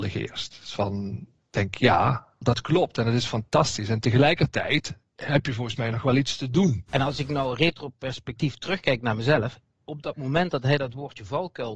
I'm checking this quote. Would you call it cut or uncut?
cut